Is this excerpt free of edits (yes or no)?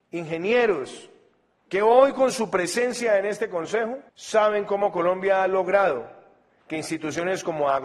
no